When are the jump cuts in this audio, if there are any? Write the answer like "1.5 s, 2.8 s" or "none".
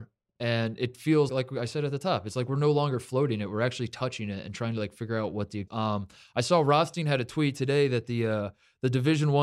1.3 s, 5.7 s

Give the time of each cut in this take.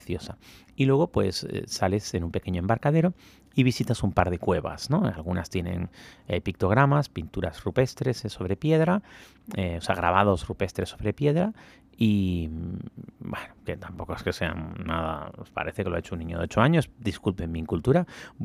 none

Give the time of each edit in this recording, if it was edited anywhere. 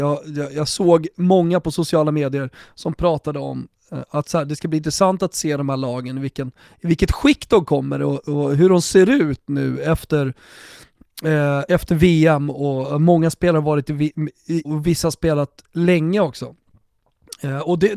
11.7 s, 14.6 s

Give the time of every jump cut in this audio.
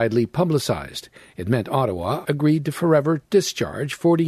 2.2 s

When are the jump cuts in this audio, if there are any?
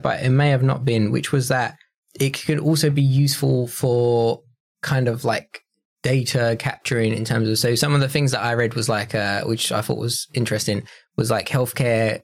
none

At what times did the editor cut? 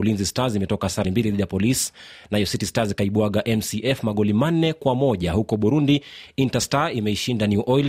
1.0 s

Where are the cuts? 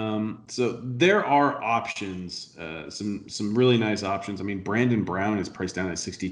none

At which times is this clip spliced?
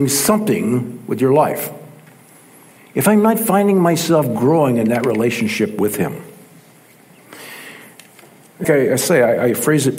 2.8 s, 8.6 s

